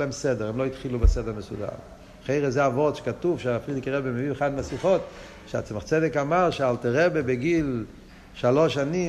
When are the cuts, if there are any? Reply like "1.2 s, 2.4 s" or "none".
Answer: none

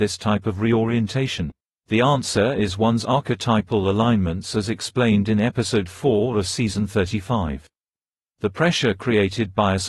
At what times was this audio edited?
none

